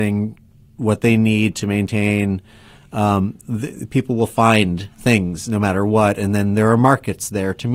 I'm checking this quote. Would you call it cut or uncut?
uncut